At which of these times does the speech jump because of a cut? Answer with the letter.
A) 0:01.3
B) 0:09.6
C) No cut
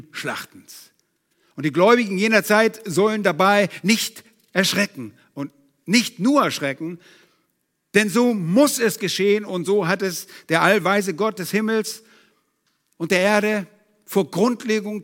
C